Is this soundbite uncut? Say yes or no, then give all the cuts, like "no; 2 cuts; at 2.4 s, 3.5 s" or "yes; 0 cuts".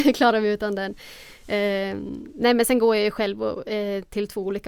yes; 0 cuts